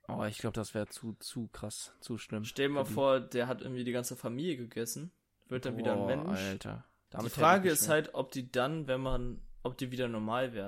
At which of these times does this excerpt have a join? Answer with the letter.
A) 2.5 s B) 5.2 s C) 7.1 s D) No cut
C